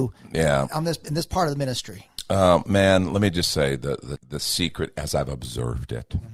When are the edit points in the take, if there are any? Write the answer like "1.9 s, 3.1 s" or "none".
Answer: 4.2 s